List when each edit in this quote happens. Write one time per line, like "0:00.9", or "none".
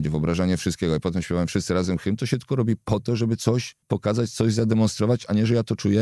0:03.8